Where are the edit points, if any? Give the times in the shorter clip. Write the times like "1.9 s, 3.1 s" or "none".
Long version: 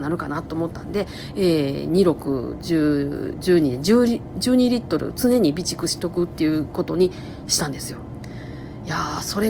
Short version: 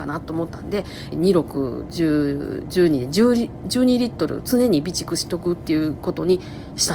1.1 s